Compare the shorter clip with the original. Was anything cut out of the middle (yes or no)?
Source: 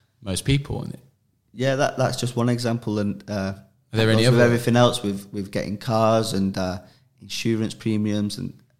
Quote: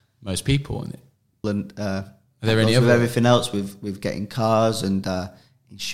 yes